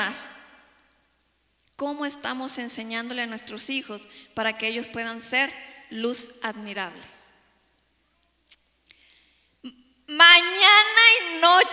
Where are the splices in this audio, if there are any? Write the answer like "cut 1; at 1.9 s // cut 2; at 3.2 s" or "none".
none